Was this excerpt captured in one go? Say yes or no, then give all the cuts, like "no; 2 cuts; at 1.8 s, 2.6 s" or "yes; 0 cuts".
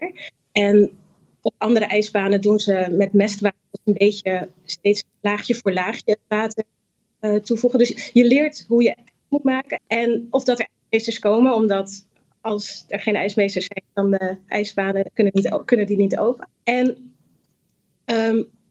no; 2 cuts; at 9.8 s, 16.5 s